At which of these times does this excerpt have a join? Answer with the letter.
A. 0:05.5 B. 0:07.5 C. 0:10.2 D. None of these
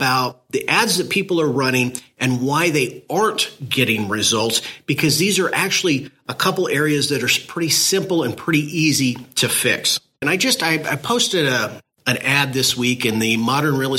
C